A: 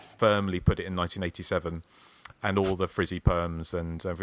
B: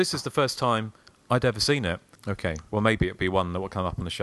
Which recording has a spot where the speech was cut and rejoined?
B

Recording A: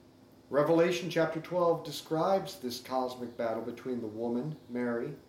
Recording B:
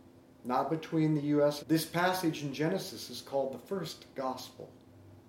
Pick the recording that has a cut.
B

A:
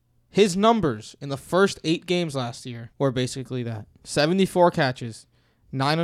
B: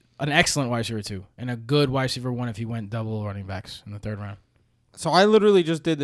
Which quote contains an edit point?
A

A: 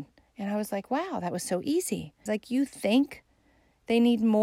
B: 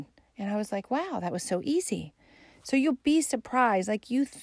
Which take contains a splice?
A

